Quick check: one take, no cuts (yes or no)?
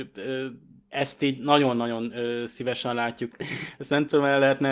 no